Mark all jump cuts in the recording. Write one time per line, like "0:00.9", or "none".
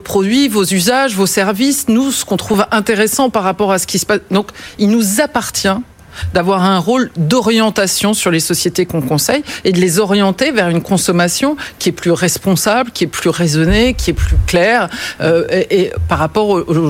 none